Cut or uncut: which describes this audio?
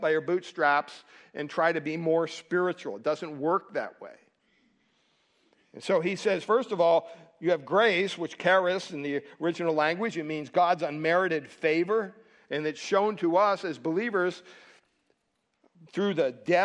uncut